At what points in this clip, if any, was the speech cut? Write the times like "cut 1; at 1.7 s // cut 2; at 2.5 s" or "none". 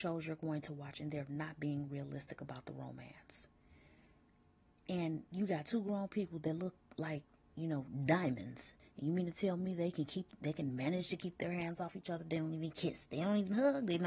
none